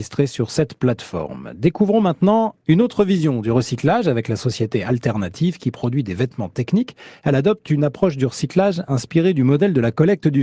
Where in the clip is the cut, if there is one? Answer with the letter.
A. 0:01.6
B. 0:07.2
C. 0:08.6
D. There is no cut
D